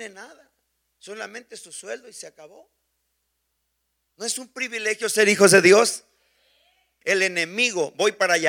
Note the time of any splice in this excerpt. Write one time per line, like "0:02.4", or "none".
0:07.0